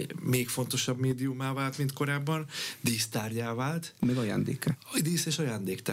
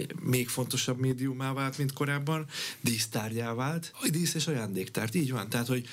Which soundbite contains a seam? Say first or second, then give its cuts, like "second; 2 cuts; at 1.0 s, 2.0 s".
second; 1 cut; at 3.9 s